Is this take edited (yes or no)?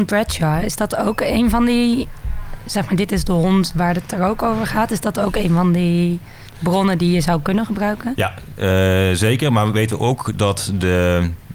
no